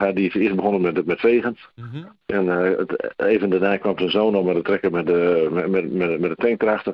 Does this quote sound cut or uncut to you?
uncut